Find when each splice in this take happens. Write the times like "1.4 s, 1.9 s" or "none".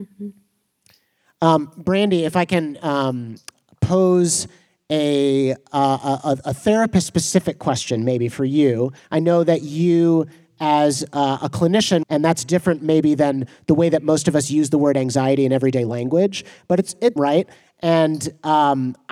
9.0 s, 12.0 s, 17.2 s

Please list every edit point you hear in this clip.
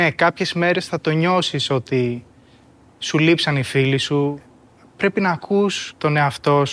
none

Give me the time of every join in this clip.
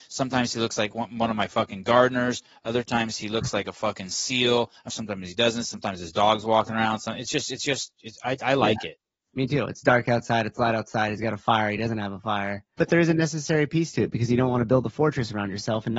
4.9 s, 12.8 s

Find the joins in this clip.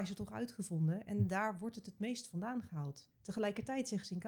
3.1 s

